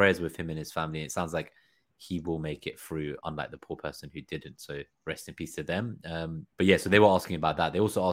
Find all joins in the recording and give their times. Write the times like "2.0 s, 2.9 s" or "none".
3.2 s, 6.5 s

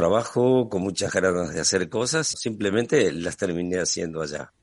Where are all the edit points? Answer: 2.3 s

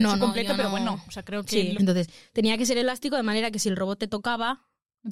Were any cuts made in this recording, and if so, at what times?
1.7 s

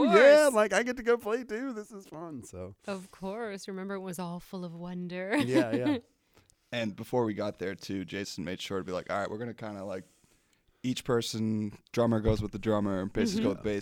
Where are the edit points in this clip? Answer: 11.9 s

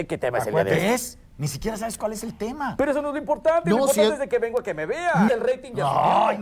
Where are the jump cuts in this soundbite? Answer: 5.3 s

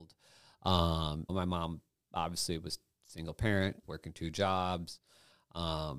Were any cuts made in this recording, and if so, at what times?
1.3 s, 3.8 s

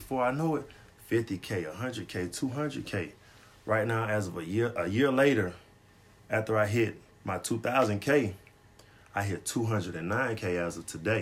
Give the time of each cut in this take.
none

